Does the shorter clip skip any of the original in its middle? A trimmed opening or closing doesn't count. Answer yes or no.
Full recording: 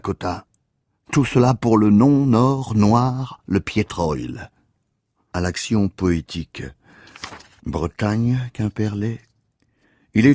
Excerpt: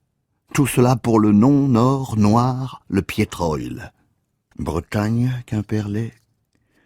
yes